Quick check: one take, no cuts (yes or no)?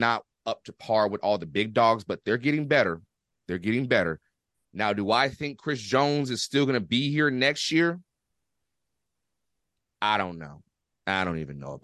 yes